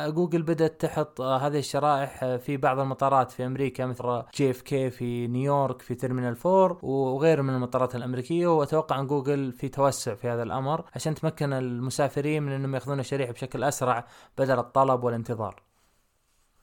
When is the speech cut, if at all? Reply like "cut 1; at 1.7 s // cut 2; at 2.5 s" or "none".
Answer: cut 1; at 4.0 s